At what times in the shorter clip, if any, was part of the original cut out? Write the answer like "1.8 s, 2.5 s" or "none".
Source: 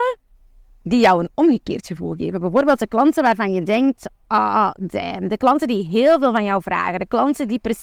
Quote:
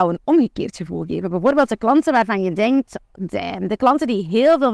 3.1 s